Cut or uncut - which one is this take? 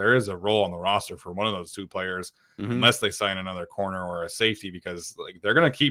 uncut